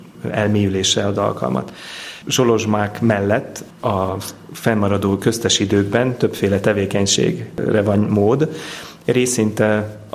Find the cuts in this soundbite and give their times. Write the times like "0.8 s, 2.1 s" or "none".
2.2 s